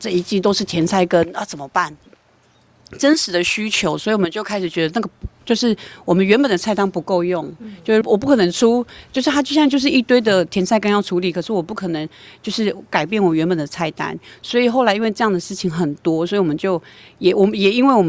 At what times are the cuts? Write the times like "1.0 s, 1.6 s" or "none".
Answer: 2.1 s, 8.0 s